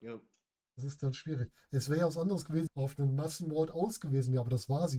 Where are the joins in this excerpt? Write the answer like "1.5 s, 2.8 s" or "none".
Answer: 2.7 s